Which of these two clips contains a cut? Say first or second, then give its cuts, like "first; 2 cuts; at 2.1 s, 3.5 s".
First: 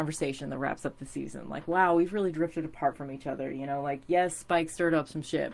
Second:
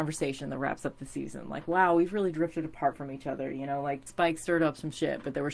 second; 1 cut; at 4.1 s